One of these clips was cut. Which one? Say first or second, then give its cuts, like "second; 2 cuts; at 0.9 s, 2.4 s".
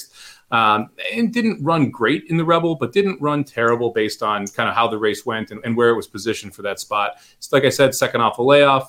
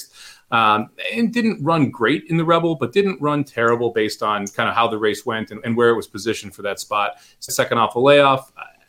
second; 1 cut; at 7.5 s